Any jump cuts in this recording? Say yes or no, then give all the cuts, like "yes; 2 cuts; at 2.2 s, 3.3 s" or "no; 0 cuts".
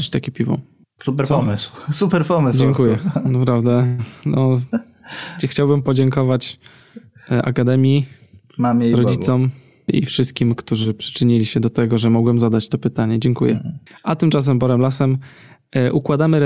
no; 0 cuts